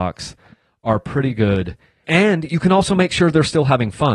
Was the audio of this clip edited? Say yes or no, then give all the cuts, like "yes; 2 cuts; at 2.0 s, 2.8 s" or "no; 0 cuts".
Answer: yes; 1 cut; at 2.0 s